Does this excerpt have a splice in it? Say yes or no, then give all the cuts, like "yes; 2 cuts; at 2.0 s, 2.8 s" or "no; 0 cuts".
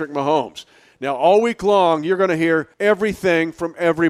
yes; 1 cut; at 2.7 s